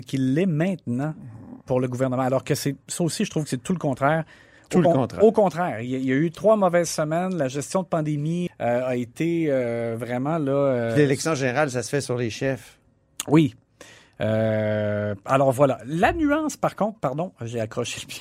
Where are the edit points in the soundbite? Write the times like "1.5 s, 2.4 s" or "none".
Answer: 8.5 s